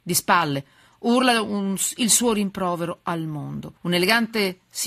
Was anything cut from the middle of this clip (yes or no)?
yes